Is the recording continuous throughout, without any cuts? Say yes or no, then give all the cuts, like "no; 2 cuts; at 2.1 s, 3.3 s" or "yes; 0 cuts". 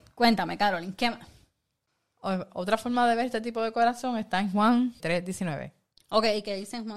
no; 1 cut; at 5.0 s